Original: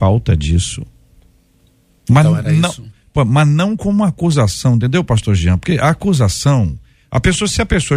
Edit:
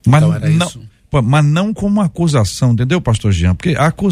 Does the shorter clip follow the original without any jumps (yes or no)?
yes